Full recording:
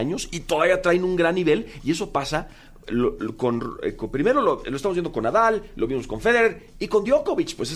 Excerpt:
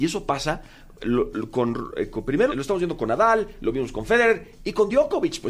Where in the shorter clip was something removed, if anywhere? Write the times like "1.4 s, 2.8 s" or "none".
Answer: 2.5 s